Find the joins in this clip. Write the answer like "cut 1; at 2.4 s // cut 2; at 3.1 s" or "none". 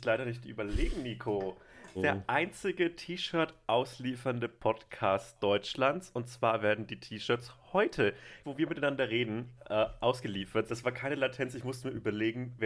cut 1; at 2.0 s // cut 2; at 8.4 s // cut 3; at 10.7 s